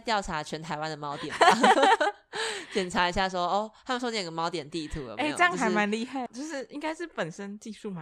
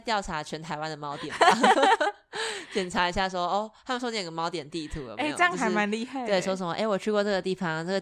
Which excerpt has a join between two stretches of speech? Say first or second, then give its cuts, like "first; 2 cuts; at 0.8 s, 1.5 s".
first; 1 cut; at 6.3 s